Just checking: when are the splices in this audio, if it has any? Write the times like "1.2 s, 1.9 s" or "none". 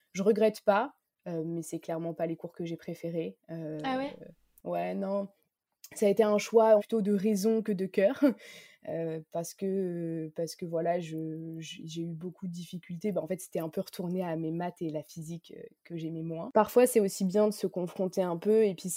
6.8 s